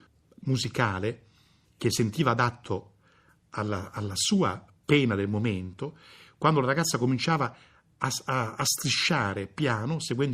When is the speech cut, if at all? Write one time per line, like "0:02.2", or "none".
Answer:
none

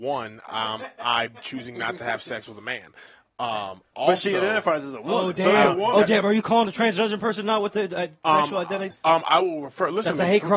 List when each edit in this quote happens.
0:08.9

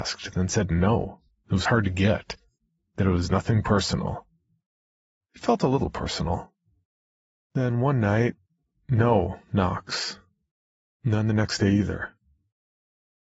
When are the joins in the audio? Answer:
0:07.4

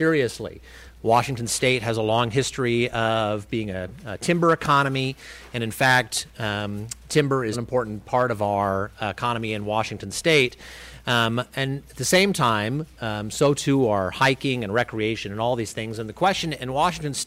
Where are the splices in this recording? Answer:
0:07.5

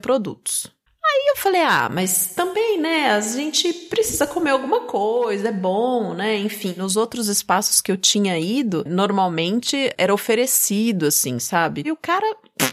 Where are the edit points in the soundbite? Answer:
0:11.8

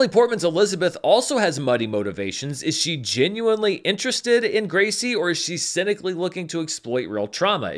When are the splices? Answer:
none

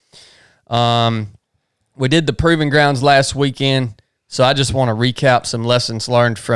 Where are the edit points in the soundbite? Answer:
none

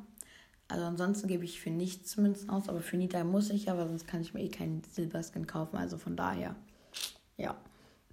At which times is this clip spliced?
none

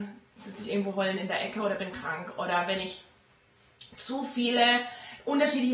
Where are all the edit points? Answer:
none

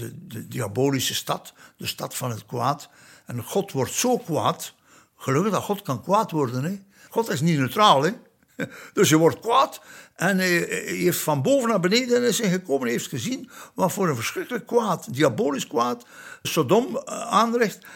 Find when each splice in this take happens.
0:07.1
0:16.4

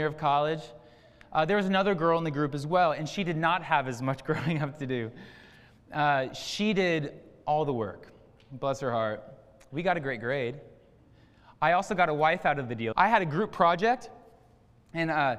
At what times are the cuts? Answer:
0:12.9

